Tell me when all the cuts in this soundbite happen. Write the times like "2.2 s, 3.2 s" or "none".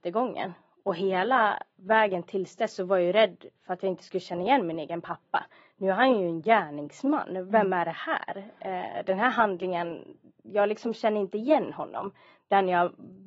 none